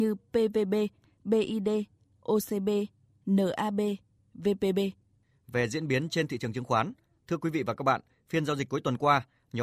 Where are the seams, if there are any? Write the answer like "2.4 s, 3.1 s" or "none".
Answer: none